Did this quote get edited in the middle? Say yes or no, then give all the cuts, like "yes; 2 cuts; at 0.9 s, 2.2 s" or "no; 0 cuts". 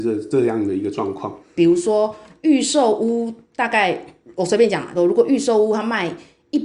yes; 2 cuts; at 1.6 s, 4.9 s